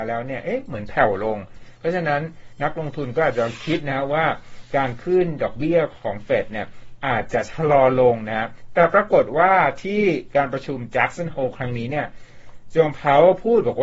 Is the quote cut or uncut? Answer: uncut